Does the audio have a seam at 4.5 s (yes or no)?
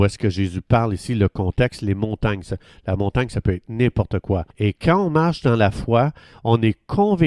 yes